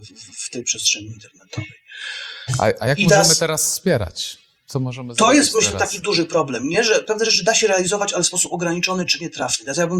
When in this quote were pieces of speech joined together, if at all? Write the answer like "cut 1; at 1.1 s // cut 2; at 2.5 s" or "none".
none